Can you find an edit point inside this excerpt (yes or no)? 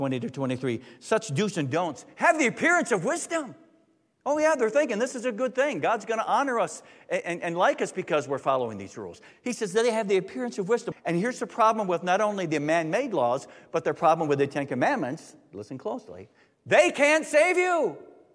yes